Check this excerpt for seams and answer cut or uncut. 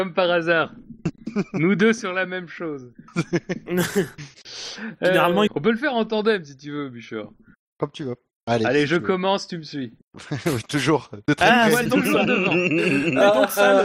cut